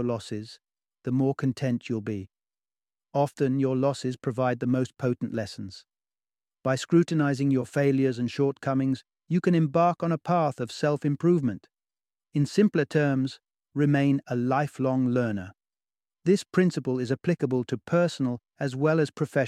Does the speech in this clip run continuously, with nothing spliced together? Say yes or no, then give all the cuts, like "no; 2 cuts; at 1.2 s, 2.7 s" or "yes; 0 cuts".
yes; 0 cuts